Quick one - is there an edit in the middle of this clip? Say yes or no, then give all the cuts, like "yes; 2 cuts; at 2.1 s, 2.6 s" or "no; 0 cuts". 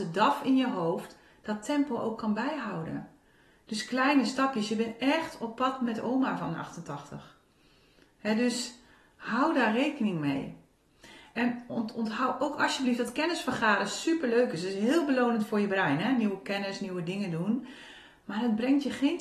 no; 0 cuts